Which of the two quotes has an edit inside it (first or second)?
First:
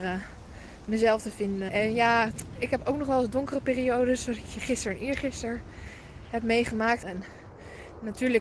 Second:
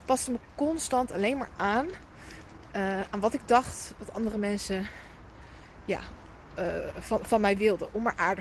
first